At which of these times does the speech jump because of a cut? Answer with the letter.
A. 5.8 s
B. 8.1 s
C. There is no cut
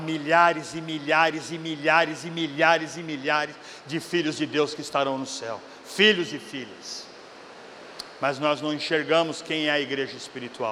C